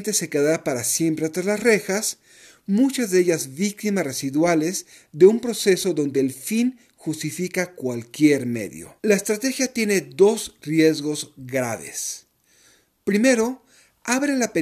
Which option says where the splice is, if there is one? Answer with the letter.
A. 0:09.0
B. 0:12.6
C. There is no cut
A